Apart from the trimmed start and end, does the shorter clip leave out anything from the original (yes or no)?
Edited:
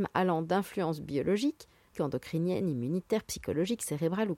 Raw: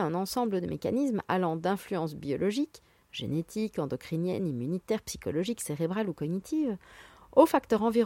yes